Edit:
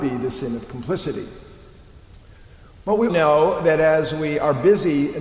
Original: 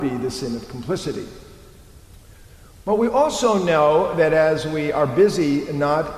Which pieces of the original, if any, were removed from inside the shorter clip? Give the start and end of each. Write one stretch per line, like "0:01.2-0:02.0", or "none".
0:03.1-0:03.6